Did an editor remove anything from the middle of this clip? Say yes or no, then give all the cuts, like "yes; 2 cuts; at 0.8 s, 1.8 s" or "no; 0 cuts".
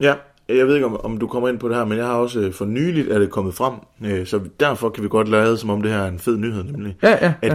no; 0 cuts